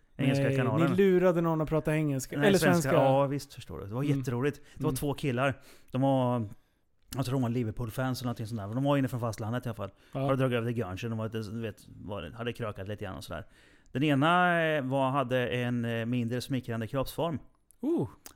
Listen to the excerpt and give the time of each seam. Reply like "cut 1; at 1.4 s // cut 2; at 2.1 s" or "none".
none